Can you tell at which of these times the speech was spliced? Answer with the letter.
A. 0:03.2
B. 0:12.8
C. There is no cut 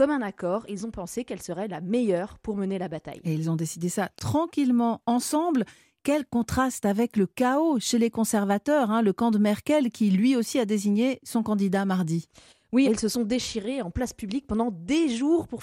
B